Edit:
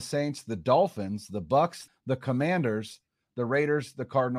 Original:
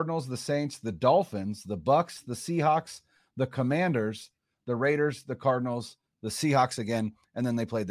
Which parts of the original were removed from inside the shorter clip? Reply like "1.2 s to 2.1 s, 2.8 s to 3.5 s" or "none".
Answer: 2.2 s to 3.2 s